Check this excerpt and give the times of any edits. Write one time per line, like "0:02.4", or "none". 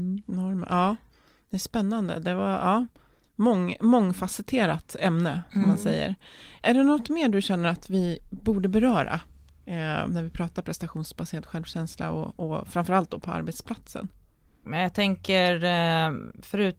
none